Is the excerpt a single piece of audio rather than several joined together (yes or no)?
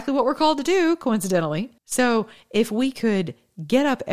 no